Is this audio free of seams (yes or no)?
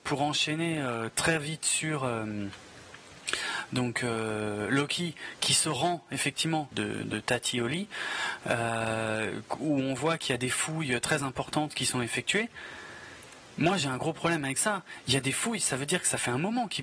no